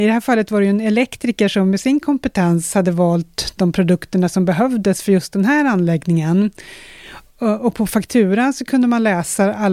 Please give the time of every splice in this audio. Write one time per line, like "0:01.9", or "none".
none